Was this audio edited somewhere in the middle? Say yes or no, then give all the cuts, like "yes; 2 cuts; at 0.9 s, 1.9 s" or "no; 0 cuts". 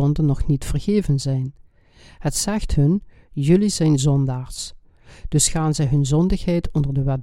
no; 0 cuts